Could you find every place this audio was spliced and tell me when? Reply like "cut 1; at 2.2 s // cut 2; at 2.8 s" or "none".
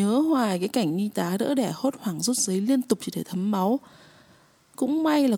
none